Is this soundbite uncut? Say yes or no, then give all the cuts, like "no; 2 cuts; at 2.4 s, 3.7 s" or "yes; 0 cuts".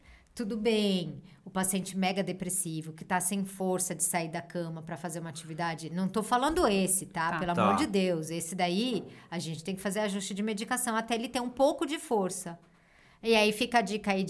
yes; 0 cuts